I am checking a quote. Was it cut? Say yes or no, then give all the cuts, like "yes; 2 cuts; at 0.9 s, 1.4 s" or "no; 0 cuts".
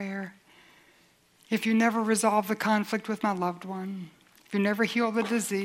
no; 0 cuts